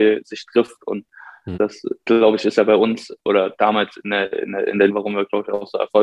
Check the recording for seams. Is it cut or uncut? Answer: cut